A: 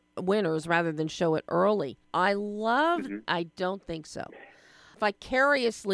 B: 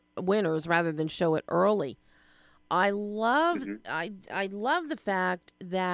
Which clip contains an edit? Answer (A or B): A